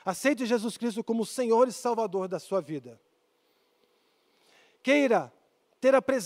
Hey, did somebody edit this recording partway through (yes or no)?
no